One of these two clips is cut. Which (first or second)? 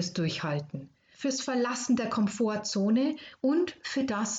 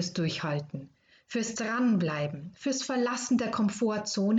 first